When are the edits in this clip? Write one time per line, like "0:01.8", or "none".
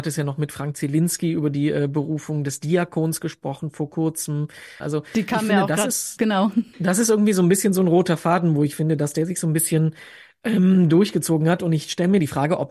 0:04.8
0:06.2